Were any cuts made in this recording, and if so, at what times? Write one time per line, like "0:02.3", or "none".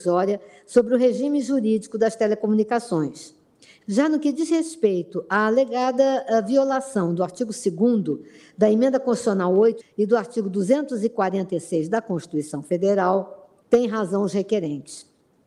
0:03.8
0:09.8
0:13.6